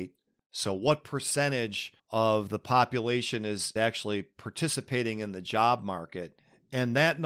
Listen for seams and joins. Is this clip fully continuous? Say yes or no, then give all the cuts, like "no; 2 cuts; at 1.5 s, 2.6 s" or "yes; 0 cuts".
no; 1 cut; at 2.0 s